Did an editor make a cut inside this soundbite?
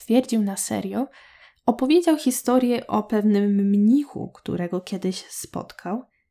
no; 0 cuts

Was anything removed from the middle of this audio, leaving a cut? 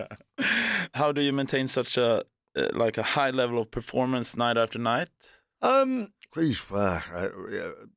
yes; 2 cuts; at 0.9 s, 6.3 s

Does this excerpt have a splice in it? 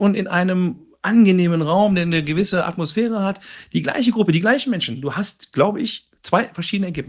no; 0 cuts

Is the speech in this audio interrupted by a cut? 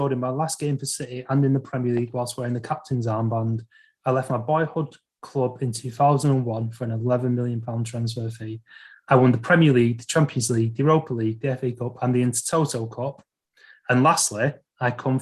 no; 0 cuts

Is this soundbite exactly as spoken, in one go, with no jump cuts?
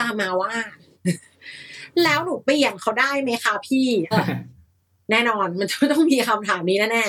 no; 1 cut; at 4.1 s

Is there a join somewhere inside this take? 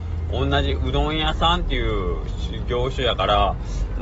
no; 0 cuts

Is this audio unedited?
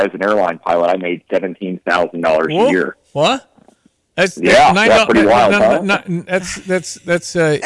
yes; 0 cuts

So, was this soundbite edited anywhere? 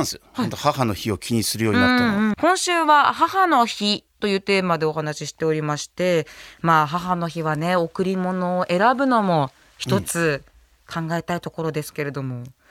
yes; 1 cut; at 2.3 s

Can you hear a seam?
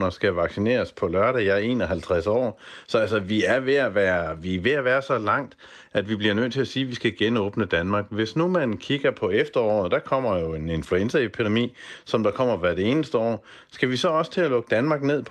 no; 0 cuts

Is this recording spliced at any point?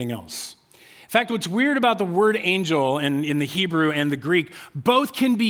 no; 0 cuts

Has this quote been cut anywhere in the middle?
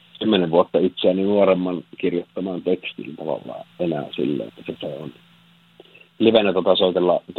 yes; 1 cut; at 4.5 s

